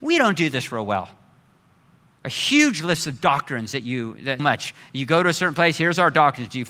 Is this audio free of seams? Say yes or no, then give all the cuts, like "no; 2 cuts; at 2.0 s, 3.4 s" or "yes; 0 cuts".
no; 2 cuts; at 2.2 s, 4.4 s